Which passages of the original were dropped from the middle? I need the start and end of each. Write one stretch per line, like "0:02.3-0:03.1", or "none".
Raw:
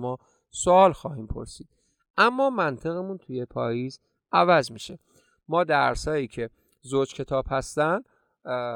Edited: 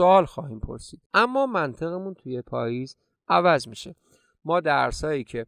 0:01.7-0:02.1

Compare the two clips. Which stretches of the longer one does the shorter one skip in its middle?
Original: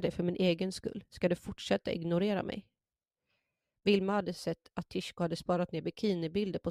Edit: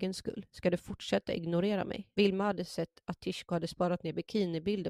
0:02.7-0:03.8

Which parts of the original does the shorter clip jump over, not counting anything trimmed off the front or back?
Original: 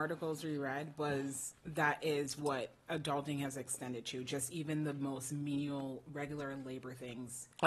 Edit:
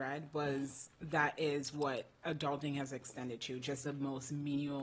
0:04.5-0:04.9

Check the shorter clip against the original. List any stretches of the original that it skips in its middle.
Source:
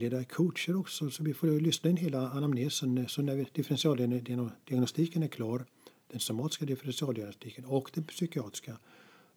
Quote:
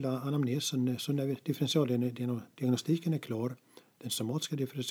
none

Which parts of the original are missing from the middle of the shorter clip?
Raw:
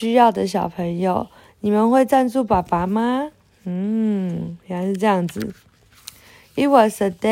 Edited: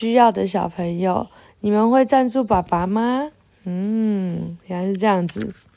none

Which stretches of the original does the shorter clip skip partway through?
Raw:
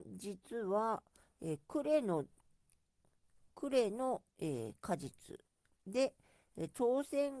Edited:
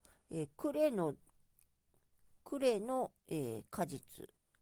none

